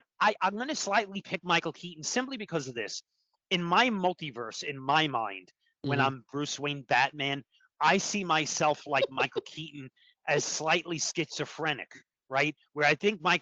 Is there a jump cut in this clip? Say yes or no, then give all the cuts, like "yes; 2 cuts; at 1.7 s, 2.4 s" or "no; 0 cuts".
no; 0 cuts